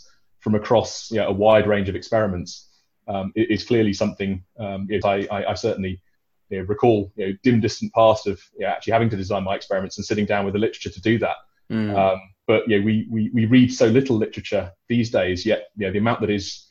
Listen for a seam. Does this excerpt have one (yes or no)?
yes